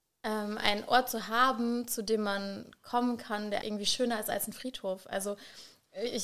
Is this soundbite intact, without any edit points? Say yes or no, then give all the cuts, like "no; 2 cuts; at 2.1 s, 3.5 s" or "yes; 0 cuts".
no; 1 cut; at 3.6 s